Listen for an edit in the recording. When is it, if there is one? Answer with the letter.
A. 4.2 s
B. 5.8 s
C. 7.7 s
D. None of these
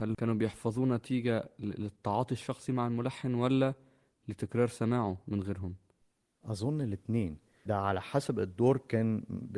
C